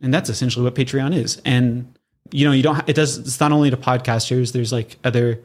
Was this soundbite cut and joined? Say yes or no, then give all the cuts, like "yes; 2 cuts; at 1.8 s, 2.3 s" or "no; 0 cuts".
no; 0 cuts